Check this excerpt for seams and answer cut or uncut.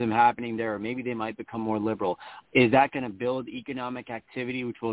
cut